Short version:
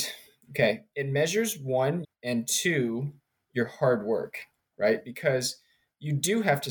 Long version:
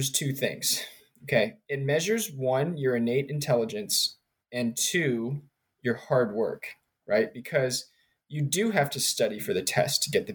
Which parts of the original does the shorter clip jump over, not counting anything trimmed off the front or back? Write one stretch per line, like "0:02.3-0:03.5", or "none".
0:02.8-0:04.3